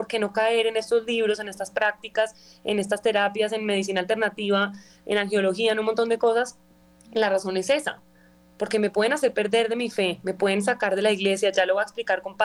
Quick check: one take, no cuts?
yes; 0 cuts

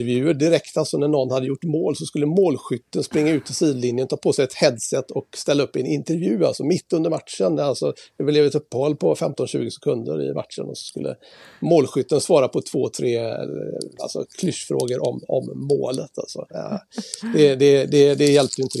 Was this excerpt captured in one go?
yes; 0 cuts

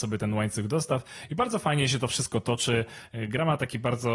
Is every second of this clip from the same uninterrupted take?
yes; 0 cuts

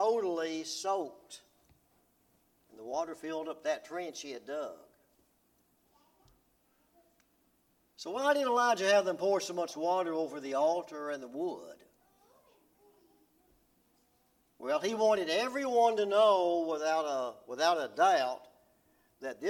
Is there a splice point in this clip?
no; 0 cuts

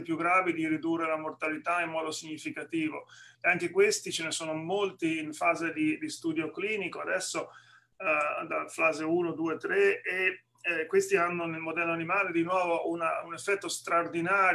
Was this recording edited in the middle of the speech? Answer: yes; 1 cut; at 3.3 s

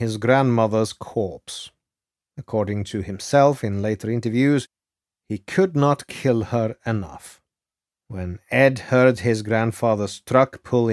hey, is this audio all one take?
no; 1 cut; at 7.9 s

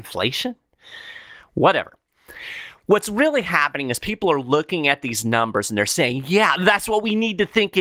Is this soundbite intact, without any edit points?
no; 1 cut; at 6.6 s

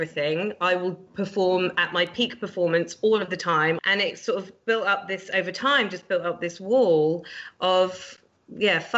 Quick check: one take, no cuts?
no; 1 cut; at 3.8 s

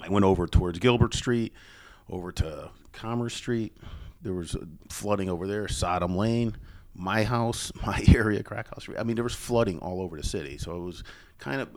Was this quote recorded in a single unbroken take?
yes; 0 cuts

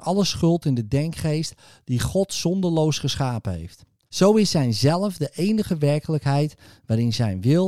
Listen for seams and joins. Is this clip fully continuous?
no; 1 cut; at 4.1 s

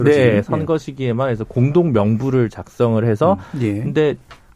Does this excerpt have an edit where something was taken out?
yes; 1 cut; at 3.5 s

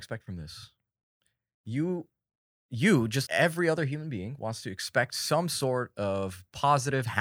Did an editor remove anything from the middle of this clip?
yes; 1 cut; at 3.3 s

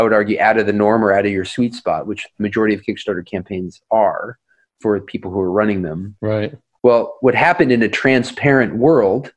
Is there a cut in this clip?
yes; 1 cut; at 6.8 s

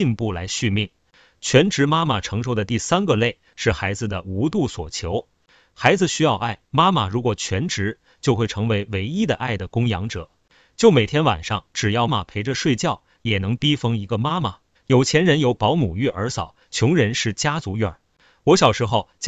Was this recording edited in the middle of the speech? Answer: yes; 2 cuts; at 12.1 s, 14.7 s

